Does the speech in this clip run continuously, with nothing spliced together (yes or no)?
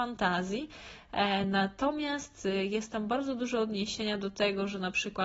yes